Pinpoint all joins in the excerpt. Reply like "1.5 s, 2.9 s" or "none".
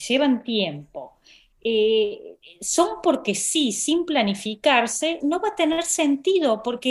5.2 s